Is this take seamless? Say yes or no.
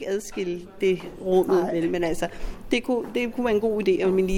yes